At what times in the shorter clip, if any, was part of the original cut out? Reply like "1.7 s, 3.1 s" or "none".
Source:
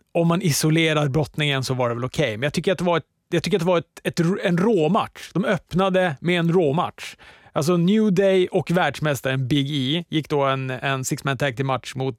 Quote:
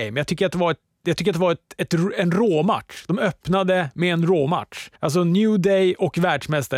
5.0 s